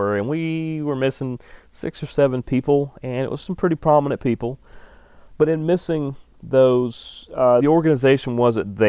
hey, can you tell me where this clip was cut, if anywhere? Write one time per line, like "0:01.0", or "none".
0:07.6